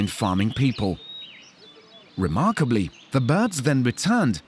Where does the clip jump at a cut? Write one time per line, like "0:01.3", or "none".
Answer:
0:02.1